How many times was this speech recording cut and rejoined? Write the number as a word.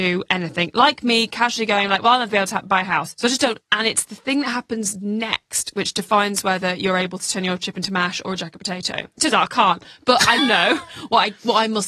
three